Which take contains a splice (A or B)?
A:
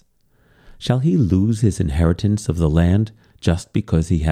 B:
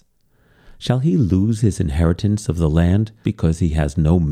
B